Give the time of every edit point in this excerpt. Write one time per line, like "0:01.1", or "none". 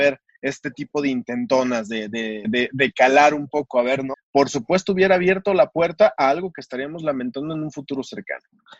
0:02.4
0:04.1

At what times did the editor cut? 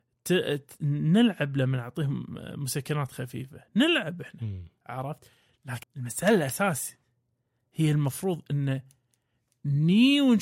0:05.8

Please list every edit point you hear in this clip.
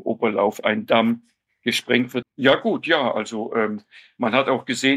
0:02.2

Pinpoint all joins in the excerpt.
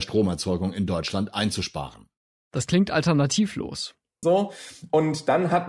0:04.2

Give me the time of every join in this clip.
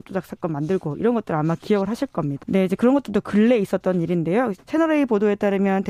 0:02.4
0:04.6

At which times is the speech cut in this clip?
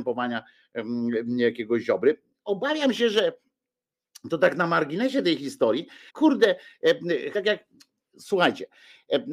0:06.1
0:07.3

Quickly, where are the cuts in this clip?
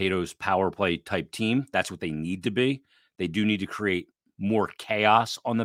none

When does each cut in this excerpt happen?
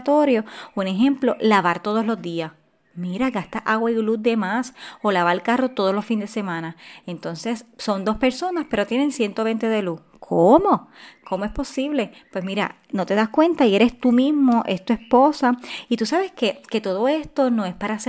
none

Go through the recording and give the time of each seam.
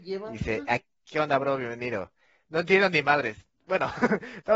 0:01.0

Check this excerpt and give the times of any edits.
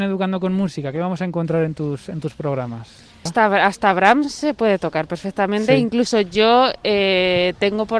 0:03.3

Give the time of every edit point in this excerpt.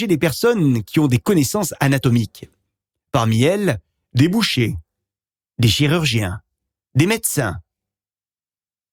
none

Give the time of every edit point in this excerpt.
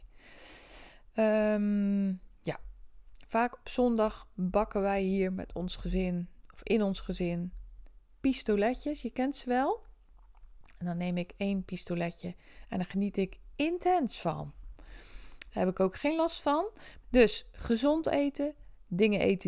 0:15.5
0:17.0

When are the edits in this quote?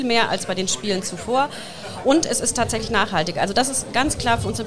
none

